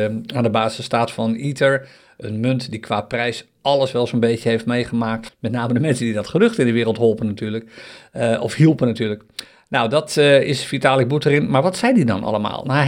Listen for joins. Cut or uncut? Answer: cut